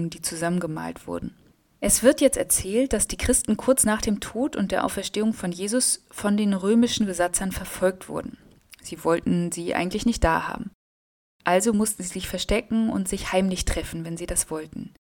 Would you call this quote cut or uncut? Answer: uncut